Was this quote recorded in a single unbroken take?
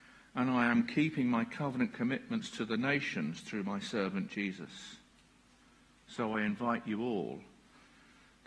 yes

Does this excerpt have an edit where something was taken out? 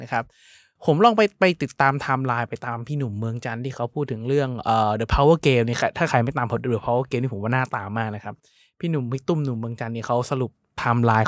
no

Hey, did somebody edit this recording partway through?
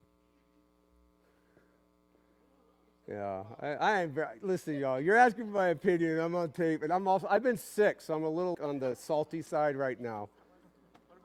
yes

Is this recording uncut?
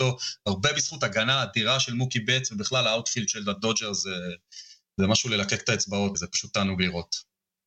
no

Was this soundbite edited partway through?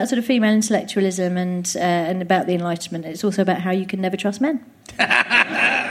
no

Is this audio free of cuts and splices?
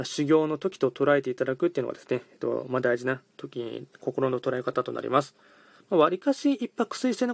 no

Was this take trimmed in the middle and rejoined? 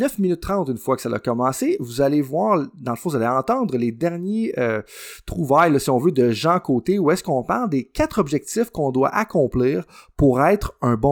no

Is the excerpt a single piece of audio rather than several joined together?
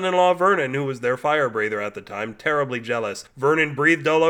yes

